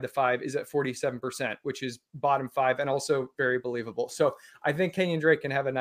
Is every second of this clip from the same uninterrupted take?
yes; 0 cuts

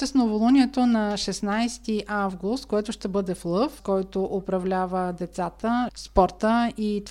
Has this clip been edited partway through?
yes; 2 cuts; at 3.8 s, 5.9 s

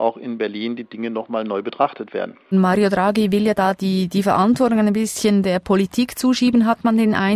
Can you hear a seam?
yes; 1 cut; at 2.5 s

